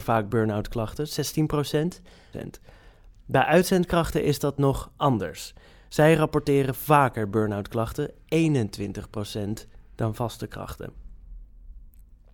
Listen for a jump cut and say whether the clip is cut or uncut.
cut